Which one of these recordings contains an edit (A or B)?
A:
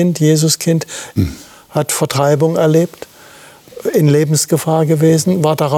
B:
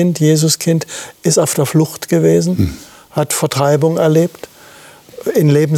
A